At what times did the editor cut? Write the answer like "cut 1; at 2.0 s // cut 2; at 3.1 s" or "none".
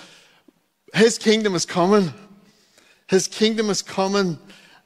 none